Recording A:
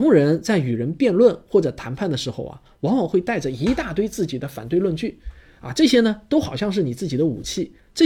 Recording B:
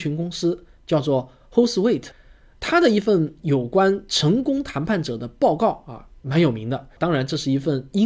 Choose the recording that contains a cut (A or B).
B